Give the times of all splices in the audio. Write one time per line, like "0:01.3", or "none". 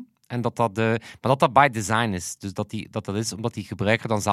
none